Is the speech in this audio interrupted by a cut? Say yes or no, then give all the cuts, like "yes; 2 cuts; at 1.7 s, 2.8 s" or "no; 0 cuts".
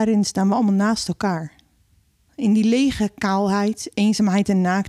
yes; 1 cut; at 2.3 s